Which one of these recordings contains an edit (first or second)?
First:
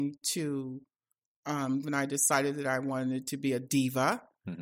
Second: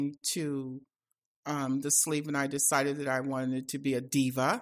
first